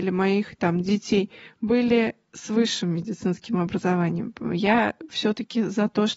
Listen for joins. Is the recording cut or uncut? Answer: uncut